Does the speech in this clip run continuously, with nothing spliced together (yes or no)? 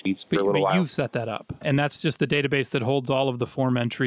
no